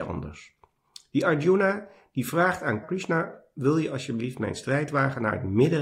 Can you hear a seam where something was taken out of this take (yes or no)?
yes